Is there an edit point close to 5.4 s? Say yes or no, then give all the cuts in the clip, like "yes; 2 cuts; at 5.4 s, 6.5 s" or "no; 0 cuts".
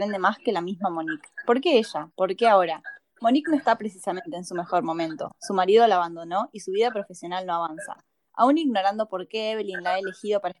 no; 0 cuts